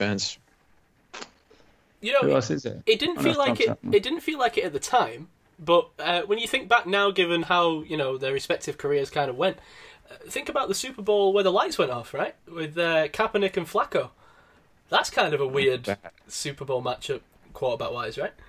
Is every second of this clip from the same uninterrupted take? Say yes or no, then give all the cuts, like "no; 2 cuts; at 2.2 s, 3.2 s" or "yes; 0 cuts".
yes; 0 cuts